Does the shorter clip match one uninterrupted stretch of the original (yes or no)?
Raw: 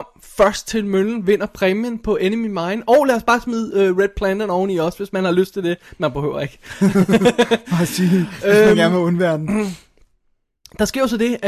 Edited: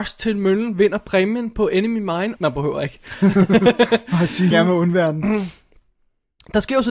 no